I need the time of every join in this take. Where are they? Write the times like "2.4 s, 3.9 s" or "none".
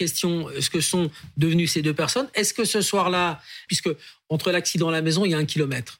3.7 s